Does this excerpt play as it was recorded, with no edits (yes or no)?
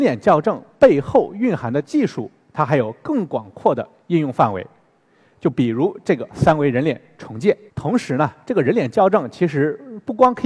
no